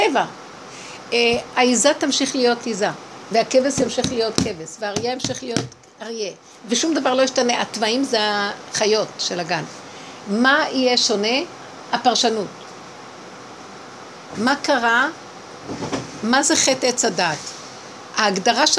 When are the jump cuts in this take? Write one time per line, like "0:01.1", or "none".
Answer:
0:14.3